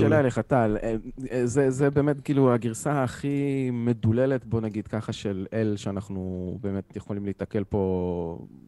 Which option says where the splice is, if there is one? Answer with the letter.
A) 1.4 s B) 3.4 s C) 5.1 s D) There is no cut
D